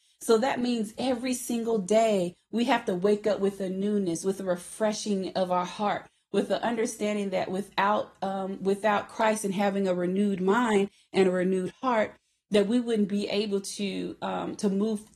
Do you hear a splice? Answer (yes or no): no